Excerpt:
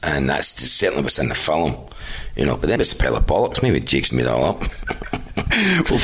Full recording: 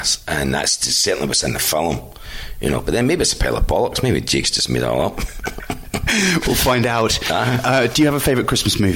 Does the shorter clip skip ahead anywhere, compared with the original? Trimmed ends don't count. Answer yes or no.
yes